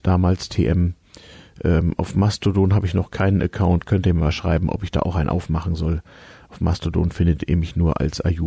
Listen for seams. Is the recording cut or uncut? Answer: uncut